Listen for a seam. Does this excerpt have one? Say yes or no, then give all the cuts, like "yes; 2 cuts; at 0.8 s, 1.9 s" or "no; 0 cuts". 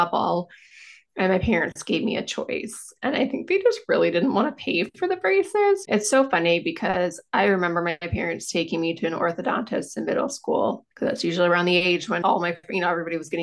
yes; 3 cuts; at 5.8 s, 10.9 s, 12.2 s